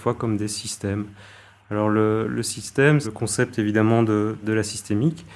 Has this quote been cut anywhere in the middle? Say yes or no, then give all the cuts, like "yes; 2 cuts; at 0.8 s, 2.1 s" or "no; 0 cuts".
yes; 2 cuts; at 3.0 s, 4.4 s